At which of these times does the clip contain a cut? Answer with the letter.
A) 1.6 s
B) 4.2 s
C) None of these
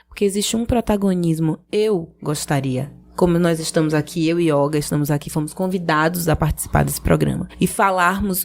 C